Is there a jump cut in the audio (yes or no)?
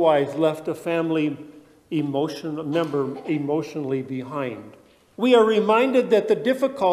yes